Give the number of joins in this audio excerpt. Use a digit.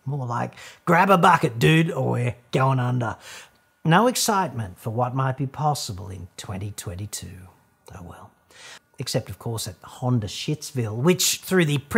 1